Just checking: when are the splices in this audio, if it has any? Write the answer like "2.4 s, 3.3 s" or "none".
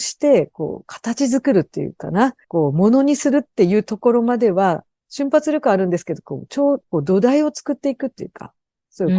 2.4 s, 6.8 s